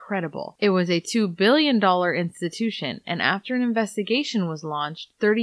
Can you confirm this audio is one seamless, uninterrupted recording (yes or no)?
yes